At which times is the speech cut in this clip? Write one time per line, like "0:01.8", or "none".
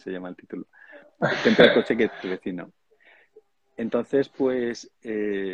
none